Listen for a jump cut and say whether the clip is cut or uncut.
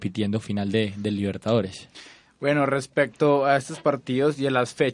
uncut